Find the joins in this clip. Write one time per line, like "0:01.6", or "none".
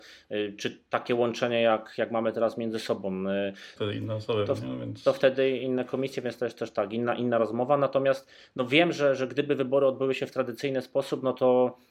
0:03.8